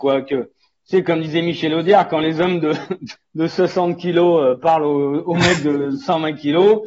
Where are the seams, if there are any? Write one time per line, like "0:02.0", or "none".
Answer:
0:03.1